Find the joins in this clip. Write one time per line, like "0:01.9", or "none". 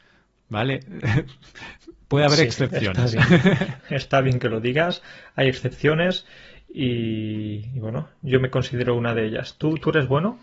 none